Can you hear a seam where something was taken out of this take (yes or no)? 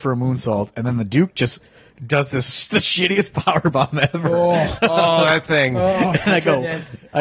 no